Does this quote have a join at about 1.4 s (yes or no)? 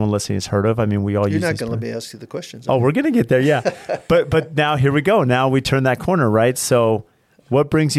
no